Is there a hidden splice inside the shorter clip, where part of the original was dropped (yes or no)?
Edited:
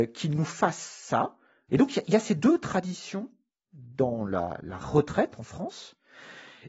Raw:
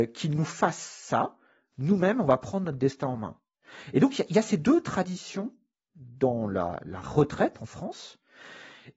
yes